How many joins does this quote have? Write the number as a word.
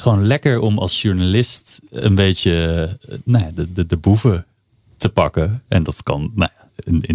zero